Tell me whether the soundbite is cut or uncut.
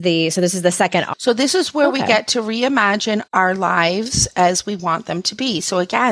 cut